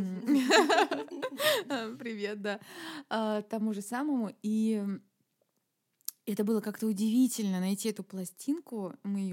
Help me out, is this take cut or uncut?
uncut